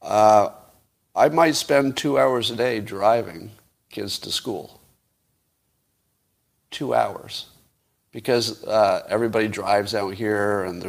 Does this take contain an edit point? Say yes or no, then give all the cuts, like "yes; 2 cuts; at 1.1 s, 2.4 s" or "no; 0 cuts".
no; 0 cuts